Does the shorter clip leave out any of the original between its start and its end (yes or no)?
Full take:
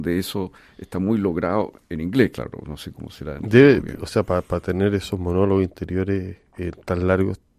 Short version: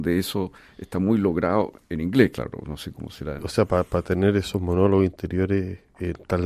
yes